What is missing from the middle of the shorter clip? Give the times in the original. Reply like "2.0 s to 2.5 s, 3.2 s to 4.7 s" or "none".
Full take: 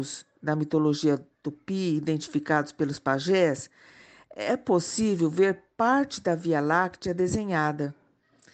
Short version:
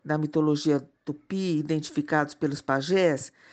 none

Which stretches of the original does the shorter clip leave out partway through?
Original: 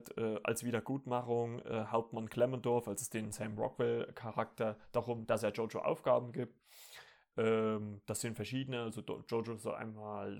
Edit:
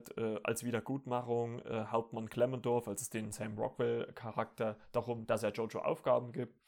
none

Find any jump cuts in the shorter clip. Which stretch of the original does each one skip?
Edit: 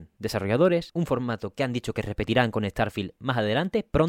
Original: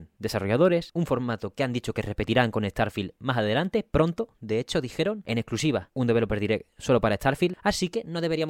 none

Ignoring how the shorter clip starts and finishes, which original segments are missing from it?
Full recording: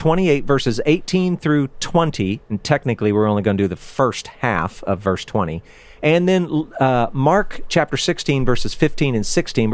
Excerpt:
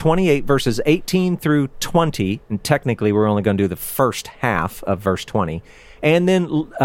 none

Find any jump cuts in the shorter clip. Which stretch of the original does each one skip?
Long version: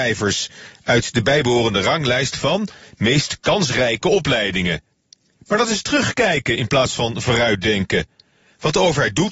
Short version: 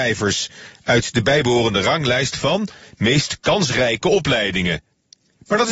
none

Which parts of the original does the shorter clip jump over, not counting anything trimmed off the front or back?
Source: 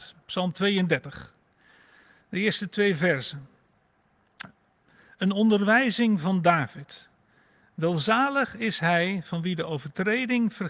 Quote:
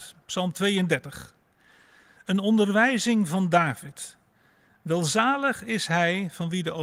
2.2 s to 5.1 s

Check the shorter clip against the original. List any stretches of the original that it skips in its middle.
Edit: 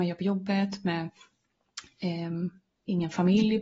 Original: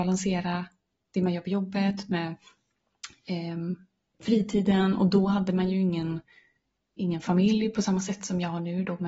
4.0 s to 6.8 s

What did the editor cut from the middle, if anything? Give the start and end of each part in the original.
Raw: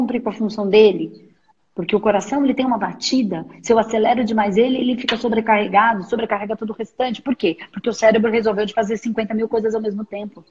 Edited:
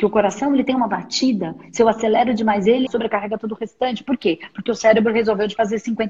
4.8 s to 6.0 s

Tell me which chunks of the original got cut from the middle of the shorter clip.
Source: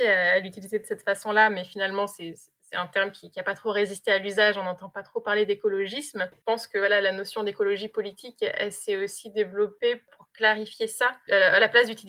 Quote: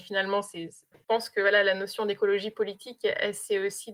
2.6 s to 6.3 s

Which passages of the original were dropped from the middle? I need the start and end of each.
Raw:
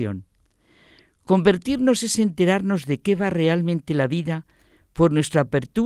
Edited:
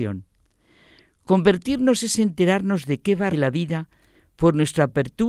3.3 s to 3.9 s

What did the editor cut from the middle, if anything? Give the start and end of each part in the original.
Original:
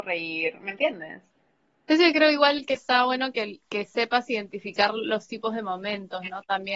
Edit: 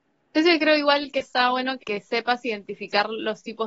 3.3 s to 3.6 s

